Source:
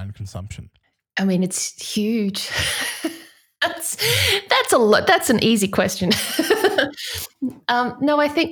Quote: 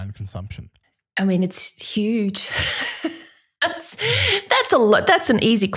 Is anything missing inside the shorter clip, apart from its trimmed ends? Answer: no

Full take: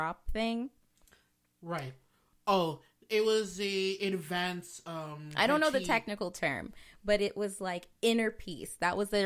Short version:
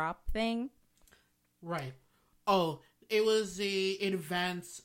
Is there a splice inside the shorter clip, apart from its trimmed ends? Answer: no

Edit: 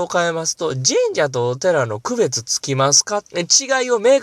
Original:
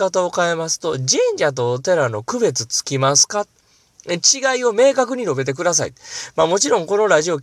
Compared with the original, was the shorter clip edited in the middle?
yes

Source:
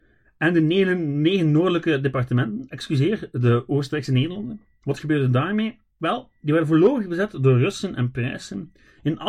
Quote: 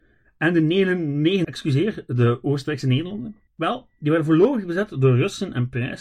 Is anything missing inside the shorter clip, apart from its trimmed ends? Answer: yes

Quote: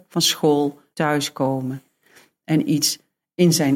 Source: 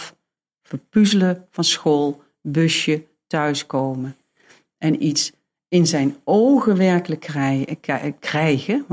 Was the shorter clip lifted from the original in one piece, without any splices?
no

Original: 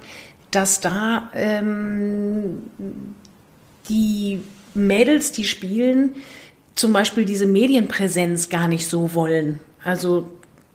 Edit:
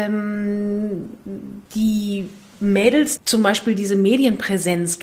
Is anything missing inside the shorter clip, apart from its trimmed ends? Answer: yes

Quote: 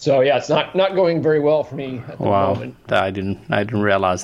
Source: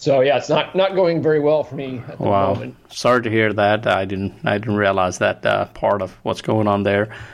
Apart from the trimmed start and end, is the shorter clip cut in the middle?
yes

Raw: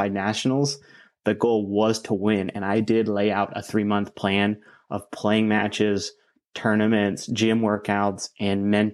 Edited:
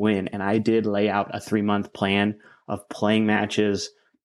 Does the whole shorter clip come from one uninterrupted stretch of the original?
yes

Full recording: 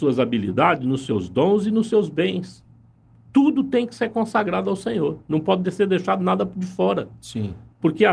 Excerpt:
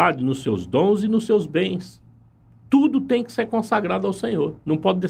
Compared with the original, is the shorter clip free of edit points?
yes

